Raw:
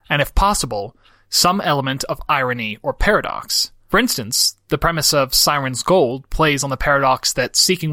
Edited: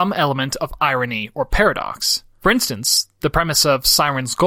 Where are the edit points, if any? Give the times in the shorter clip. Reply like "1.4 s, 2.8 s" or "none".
none